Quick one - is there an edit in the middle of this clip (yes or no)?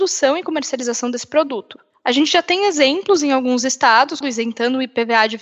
yes